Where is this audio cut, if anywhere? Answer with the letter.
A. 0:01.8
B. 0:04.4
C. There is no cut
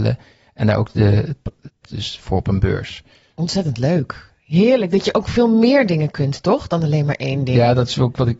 A